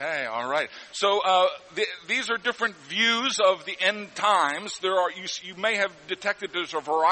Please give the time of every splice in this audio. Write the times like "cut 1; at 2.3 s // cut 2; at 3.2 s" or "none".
none

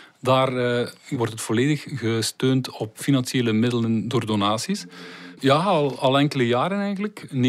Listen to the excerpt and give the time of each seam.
cut 1; at 1.1 s // cut 2; at 5.3 s

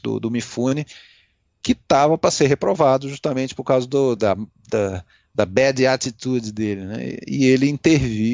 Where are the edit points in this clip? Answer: cut 1; at 4.2 s

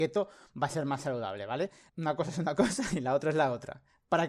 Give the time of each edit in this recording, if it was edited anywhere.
cut 1; at 1.9 s

